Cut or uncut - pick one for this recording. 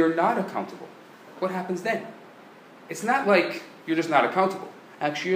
uncut